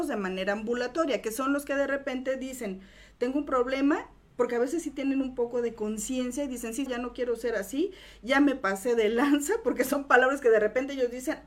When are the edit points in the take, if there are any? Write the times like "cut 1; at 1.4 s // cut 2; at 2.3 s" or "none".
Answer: cut 1; at 6.9 s